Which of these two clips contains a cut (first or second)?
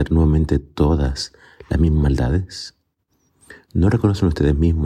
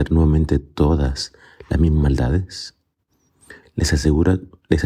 second